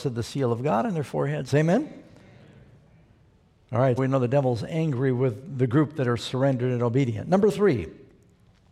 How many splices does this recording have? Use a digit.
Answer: 2